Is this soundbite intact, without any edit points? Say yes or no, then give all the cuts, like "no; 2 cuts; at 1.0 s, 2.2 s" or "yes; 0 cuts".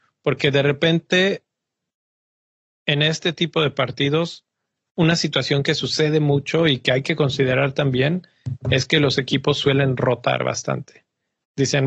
yes; 0 cuts